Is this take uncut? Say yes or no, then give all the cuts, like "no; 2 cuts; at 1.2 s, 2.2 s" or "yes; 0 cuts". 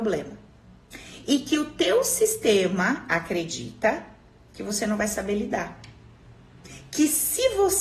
yes; 0 cuts